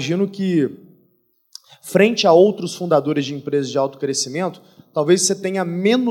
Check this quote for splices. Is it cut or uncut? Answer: uncut